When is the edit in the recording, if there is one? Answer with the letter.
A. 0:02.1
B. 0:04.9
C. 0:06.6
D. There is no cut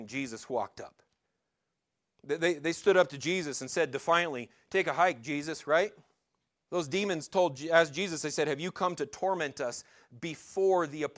C